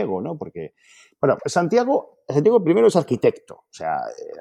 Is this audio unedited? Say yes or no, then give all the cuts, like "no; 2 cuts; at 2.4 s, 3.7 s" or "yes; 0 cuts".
no; 1 cut; at 1.4 s